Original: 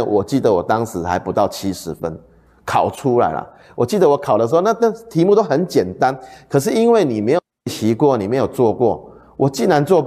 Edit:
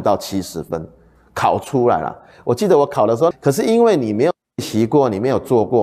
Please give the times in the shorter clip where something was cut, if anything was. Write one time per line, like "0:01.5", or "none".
0:03.3